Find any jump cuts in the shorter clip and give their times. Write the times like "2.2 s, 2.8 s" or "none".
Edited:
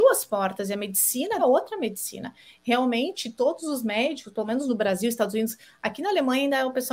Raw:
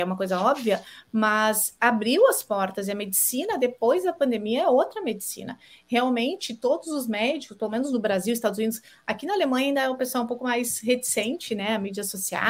1.4 s